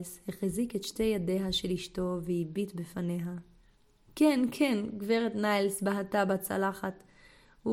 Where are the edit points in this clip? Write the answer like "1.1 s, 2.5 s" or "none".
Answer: 4.0 s